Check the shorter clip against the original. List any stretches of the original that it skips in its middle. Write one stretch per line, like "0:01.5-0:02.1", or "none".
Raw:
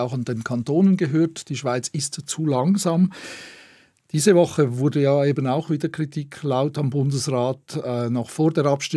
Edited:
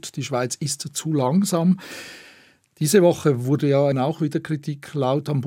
0:05.2-0:05.4